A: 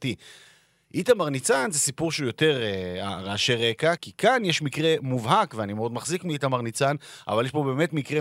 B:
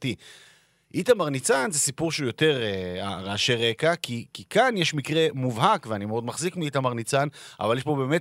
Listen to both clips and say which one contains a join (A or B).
A